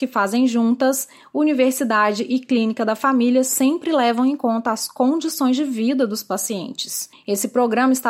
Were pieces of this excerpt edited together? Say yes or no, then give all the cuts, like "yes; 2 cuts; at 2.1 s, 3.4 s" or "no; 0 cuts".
yes; 1 cut; at 7.1 s